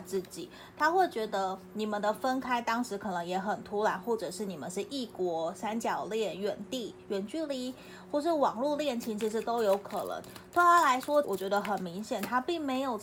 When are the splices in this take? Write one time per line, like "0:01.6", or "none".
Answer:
0:11.2